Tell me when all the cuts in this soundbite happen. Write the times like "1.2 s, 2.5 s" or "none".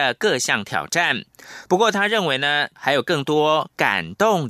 2.8 s